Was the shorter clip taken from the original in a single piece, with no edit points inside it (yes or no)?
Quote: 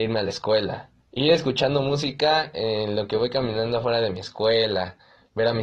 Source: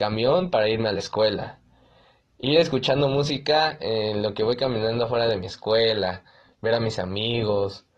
no